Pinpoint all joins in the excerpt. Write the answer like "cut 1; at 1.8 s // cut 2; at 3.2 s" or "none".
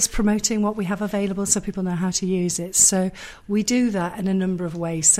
none